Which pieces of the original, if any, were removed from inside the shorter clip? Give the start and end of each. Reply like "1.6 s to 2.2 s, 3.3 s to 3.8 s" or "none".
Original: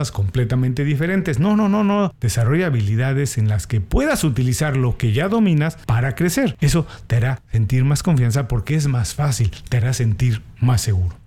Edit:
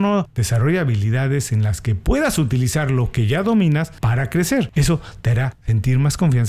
none